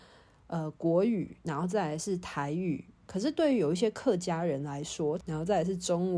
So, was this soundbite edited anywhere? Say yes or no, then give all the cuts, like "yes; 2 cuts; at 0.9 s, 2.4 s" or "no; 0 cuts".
yes; 2 cuts; at 3.0 s, 5.2 s